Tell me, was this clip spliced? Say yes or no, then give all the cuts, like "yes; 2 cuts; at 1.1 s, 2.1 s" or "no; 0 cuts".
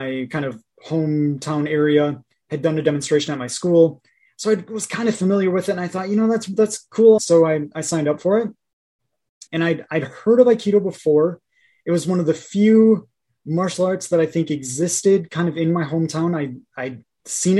yes; 2 cuts; at 7.2 s, 9.5 s